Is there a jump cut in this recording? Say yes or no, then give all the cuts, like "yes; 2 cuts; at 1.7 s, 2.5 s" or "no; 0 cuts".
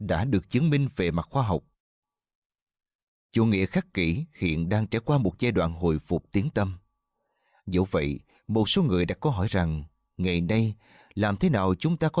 no; 0 cuts